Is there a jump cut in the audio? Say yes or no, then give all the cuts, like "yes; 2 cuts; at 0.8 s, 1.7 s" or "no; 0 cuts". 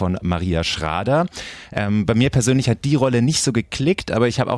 no; 0 cuts